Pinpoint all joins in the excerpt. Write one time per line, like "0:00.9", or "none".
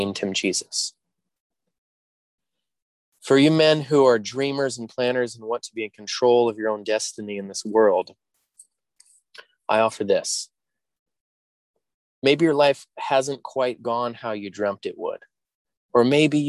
none